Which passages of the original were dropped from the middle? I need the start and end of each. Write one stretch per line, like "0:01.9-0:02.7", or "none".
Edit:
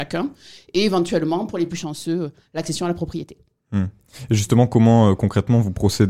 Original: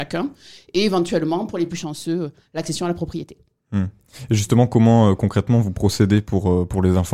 none